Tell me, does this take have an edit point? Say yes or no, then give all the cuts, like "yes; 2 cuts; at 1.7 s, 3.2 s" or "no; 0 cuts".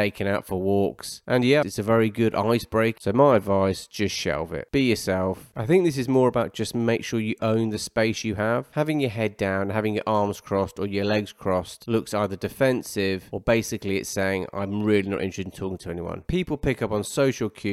yes; 3 cuts; at 1.6 s, 3.0 s, 5.5 s